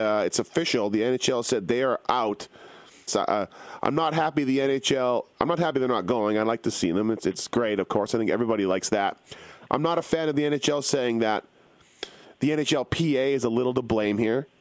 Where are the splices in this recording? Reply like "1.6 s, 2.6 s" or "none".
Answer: 3.1 s